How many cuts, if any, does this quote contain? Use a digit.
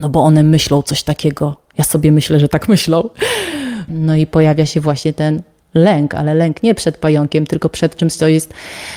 1